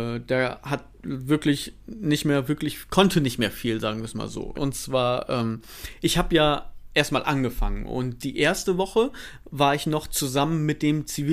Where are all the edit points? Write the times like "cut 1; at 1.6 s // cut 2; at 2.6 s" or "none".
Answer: cut 1; at 4.6 s